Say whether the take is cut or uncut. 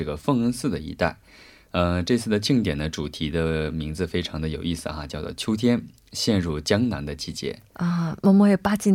uncut